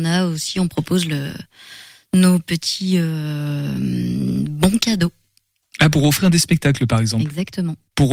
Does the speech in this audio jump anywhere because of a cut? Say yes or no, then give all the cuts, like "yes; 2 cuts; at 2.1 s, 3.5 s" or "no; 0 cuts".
no; 0 cuts